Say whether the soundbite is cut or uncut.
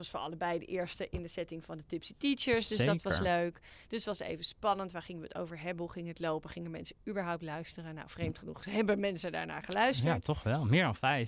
uncut